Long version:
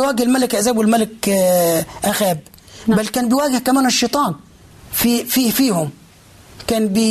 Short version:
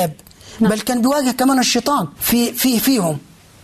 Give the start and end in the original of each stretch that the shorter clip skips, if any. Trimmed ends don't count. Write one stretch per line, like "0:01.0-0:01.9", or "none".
0:04.4-0:04.9